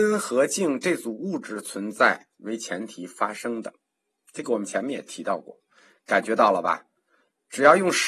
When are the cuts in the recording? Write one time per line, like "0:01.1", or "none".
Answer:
none